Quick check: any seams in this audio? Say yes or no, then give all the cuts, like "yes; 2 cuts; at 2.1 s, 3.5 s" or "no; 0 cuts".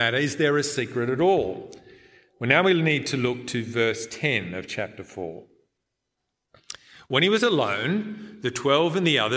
no; 0 cuts